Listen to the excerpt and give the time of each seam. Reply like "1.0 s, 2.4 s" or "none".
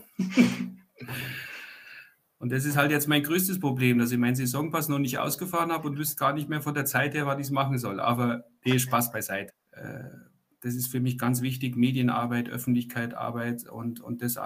9.5 s